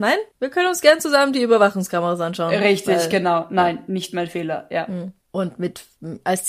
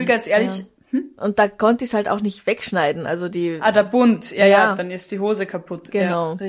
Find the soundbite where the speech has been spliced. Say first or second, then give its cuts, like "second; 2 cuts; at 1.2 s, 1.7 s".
first; 1 cut; at 5.2 s